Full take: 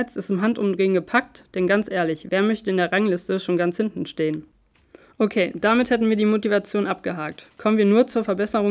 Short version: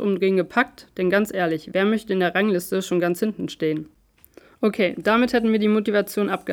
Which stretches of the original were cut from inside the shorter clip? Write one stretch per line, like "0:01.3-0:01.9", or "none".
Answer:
none